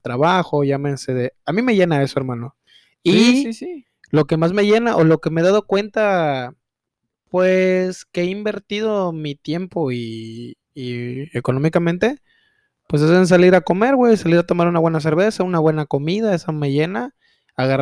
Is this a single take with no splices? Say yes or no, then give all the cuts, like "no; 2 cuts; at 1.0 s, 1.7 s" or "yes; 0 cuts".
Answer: yes; 0 cuts